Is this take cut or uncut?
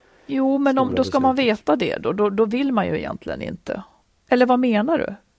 uncut